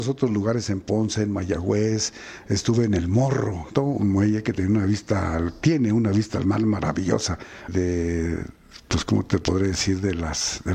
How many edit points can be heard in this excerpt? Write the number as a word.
two